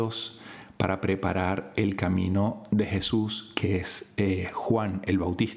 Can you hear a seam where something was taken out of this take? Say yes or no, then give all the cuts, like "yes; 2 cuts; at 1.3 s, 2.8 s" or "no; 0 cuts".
no; 0 cuts